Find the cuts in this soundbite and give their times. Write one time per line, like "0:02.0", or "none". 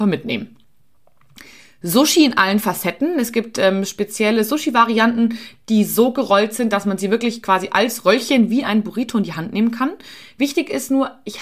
none